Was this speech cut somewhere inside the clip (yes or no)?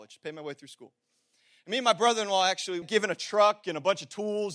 yes